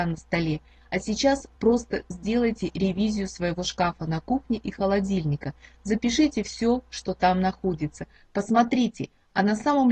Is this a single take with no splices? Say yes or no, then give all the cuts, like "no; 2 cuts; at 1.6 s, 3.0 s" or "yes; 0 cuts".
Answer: yes; 0 cuts